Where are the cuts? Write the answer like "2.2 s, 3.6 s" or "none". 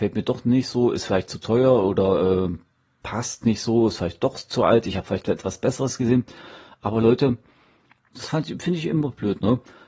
8.1 s